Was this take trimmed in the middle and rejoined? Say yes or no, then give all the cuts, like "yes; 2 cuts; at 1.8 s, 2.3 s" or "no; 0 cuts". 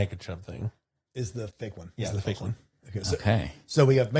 no; 0 cuts